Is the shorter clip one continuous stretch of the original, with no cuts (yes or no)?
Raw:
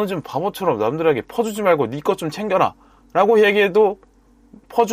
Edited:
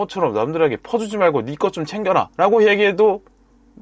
no